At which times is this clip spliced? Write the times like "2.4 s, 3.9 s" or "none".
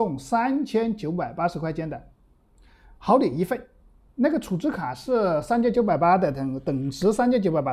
none

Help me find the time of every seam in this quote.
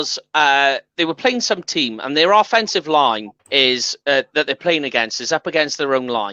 3.4 s

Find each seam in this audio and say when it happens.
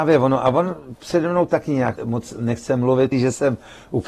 2.0 s, 3.1 s

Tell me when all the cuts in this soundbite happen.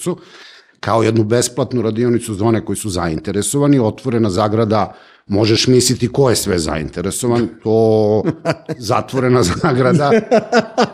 none

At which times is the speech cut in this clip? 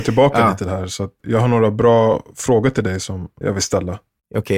1.2 s, 3.4 s

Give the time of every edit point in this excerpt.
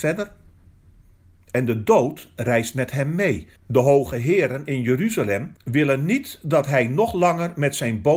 3.6 s, 5.6 s

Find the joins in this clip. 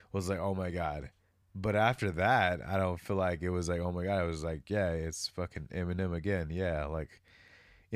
none

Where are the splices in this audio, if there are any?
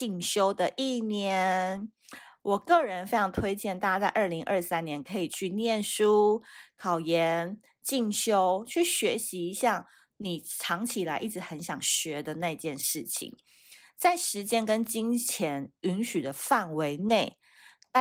none

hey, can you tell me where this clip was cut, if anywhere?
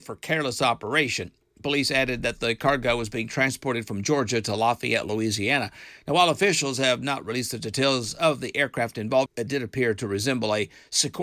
9.3 s

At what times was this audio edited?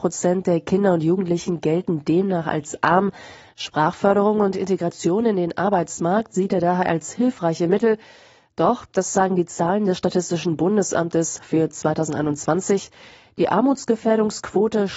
3.5 s

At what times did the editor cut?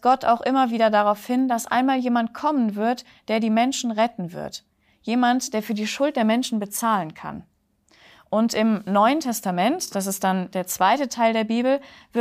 none

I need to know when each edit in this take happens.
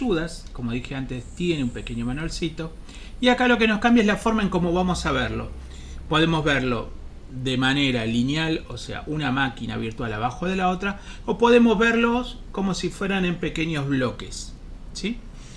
none

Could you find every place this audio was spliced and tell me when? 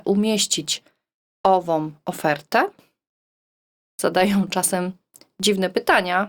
3.8 s

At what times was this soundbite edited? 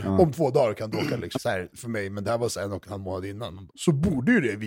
1.3 s, 3.7 s

